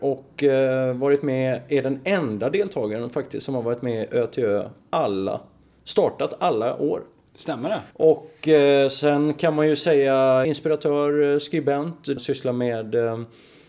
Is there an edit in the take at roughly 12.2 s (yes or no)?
yes